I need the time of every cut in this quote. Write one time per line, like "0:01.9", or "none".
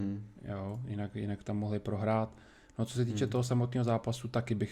none